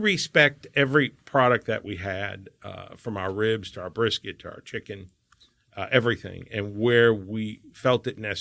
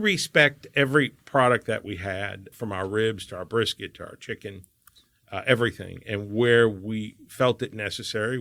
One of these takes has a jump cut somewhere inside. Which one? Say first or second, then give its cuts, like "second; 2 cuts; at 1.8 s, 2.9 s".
second; 1 cut; at 2.5 s